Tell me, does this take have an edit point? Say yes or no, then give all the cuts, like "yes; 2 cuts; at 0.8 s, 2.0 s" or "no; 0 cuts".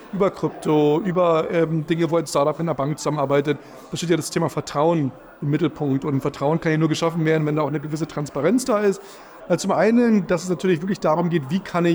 yes; 1 cut; at 9.4 s